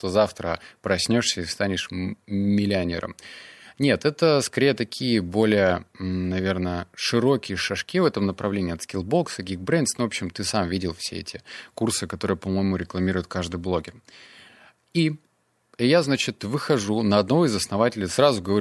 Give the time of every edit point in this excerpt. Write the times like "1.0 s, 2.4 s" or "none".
none